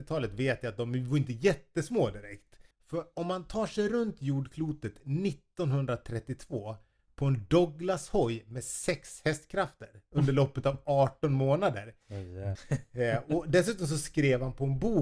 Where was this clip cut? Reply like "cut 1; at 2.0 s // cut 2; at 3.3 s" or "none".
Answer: cut 1; at 2.7 s // cut 2; at 12.6 s